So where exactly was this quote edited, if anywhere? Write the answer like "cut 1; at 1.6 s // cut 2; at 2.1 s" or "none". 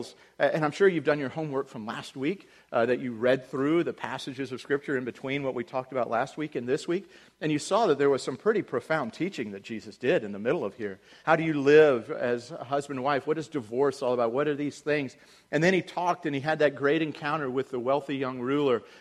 cut 1; at 11.2 s